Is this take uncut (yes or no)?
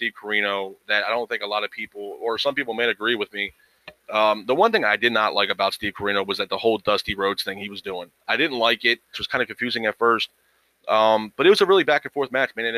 no